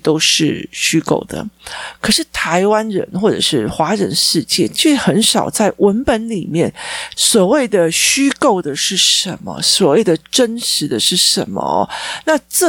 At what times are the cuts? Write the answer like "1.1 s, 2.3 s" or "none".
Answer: 7.1 s